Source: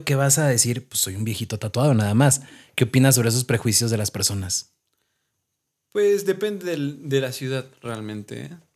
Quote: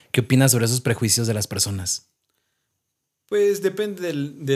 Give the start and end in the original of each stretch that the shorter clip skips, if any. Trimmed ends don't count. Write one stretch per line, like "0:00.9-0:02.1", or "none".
none